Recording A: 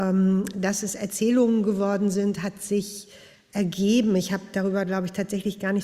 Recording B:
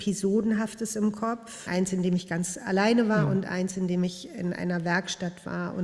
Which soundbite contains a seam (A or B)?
B